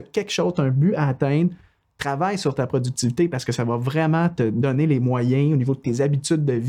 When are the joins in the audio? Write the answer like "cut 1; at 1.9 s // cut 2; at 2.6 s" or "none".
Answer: none